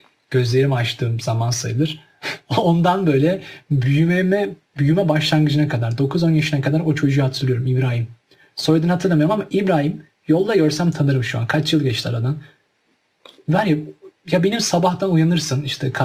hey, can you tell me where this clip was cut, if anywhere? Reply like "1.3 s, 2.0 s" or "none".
none